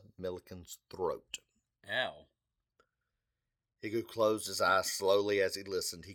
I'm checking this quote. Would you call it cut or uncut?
uncut